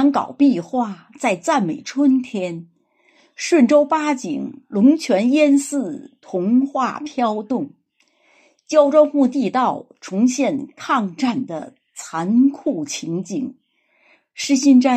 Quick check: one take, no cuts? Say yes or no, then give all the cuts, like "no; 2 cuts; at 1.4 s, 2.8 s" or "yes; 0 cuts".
yes; 0 cuts